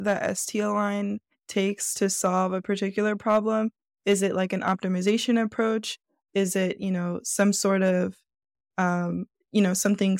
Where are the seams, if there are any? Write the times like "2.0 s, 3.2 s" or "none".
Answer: none